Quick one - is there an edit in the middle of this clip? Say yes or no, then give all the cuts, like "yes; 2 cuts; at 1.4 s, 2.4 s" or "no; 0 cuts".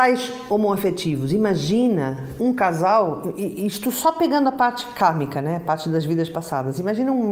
no; 0 cuts